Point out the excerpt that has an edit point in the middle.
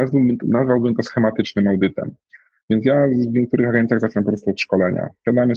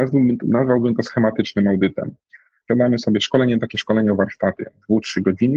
second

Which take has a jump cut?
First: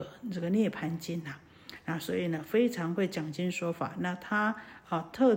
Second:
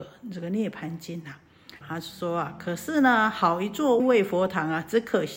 second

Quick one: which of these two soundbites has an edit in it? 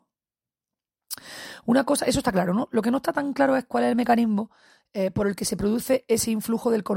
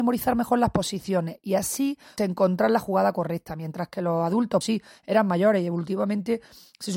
second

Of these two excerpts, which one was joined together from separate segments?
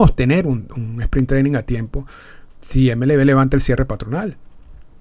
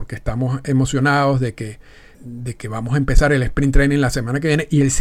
second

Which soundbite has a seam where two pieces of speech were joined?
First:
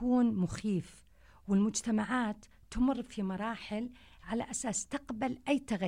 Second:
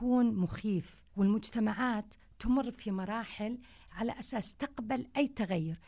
second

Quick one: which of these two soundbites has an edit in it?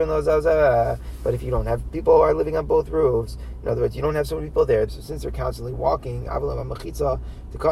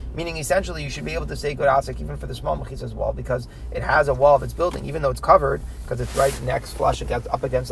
first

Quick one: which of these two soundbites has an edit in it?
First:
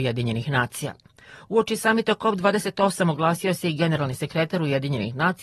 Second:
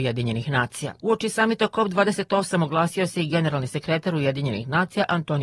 second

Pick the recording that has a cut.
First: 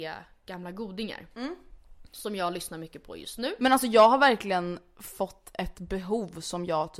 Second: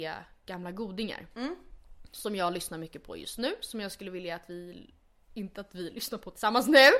first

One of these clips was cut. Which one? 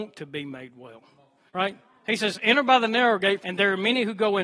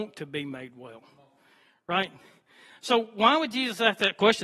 first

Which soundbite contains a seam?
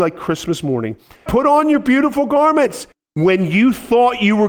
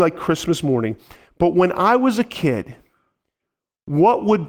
first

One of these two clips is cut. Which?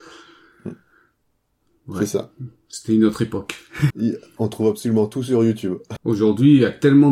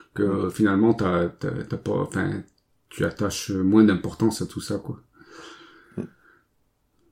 first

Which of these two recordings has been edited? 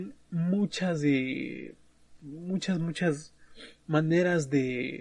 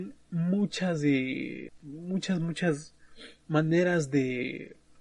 second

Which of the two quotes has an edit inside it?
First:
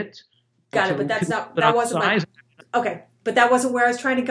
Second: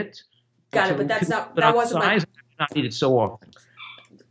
first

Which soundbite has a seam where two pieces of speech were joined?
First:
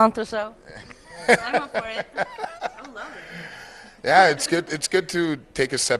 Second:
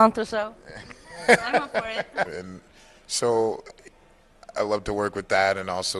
second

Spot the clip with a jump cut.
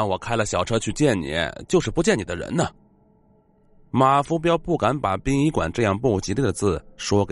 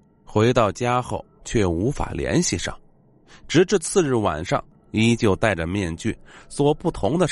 second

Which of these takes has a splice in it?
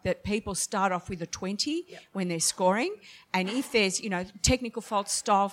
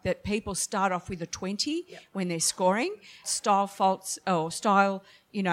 second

